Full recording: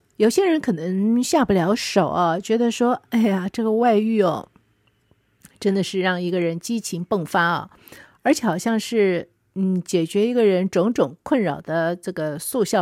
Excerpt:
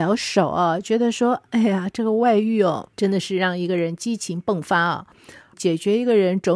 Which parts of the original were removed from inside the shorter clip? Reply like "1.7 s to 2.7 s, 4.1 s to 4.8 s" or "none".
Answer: 4.5 s to 5.6 s, 8.2 s to 9.8 s